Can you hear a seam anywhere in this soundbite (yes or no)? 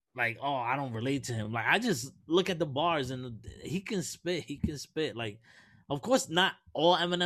no